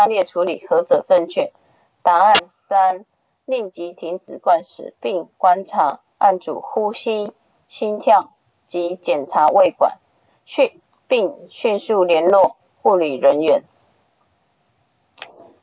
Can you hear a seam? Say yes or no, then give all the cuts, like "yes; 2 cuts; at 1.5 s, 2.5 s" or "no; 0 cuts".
no; 0 cuts